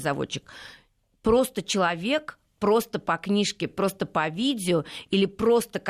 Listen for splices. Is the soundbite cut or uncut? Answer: uncut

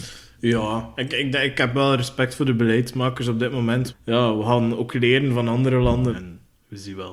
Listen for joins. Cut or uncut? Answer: cut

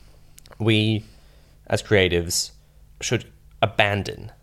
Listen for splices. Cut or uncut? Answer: cut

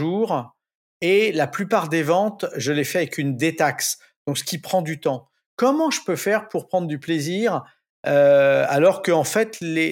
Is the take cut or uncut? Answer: uncut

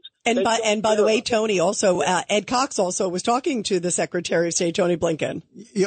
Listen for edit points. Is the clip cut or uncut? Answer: uncut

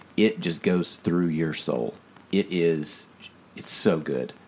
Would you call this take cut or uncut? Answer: cut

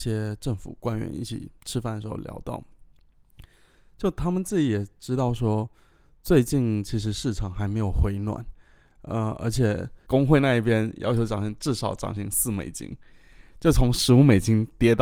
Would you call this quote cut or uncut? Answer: cut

